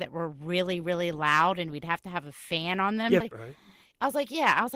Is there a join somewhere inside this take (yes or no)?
yes